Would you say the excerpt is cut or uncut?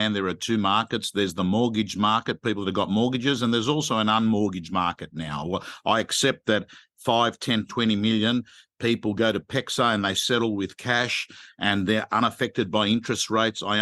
cut